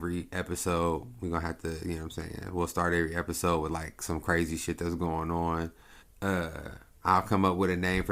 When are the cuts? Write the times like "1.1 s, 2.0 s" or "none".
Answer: 6.0 s